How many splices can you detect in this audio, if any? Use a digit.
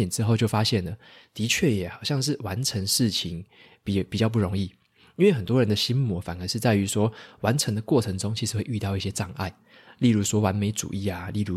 0